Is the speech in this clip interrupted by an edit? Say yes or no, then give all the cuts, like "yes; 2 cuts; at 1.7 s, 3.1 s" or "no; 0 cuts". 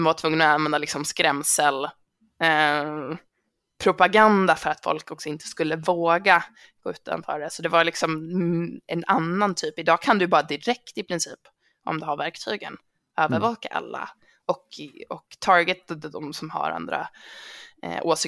no; 0 cuts